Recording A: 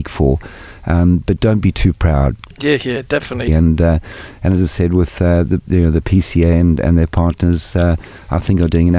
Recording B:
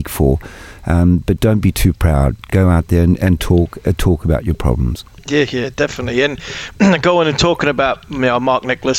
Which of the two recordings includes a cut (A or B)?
A